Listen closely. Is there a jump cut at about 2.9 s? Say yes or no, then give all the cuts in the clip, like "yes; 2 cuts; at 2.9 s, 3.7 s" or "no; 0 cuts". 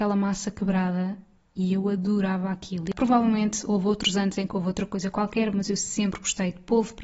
yes; 2 cuts; at 2.9 s, 5.5 s